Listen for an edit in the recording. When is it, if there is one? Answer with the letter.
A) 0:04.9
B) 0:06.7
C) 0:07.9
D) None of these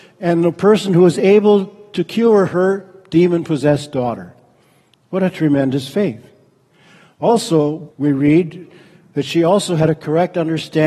C